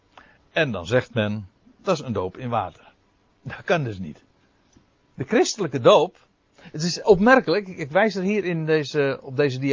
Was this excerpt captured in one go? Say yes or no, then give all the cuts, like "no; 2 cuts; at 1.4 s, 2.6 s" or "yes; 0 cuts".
yes; 0 cuts